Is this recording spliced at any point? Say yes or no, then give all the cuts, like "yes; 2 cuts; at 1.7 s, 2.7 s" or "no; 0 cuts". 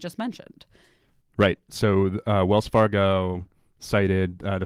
no; 0 cuts